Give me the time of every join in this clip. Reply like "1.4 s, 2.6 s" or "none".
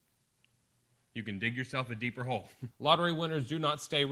1.0 s, 2.7 s